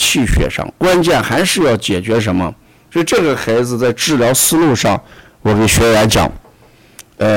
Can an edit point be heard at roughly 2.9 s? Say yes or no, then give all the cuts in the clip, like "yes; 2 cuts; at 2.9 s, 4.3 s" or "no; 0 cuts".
yes; 1 cut; at 2.9 s